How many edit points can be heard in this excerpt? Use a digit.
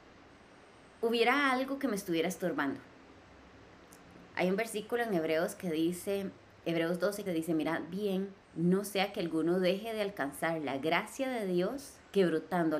3